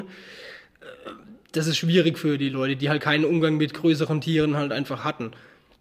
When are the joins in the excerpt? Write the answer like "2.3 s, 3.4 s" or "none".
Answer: none